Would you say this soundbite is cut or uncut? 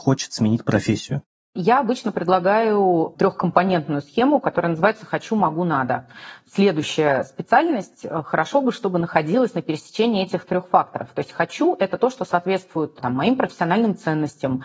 uncut